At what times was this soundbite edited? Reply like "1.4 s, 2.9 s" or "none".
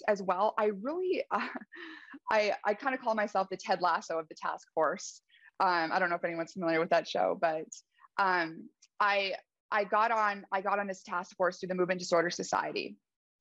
none